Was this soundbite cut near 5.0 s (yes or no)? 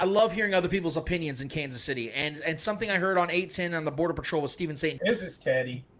yes